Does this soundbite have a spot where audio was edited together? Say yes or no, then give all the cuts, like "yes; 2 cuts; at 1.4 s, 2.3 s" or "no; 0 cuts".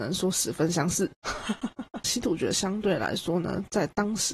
yes; 1 cut; at 2.0 s